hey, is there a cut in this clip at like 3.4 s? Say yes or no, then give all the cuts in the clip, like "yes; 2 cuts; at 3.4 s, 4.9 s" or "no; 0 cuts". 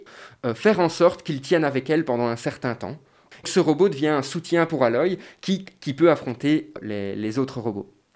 yes; 1 cut; at 3.4 s